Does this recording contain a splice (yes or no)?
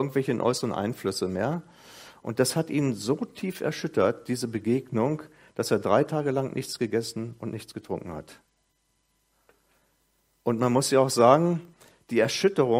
no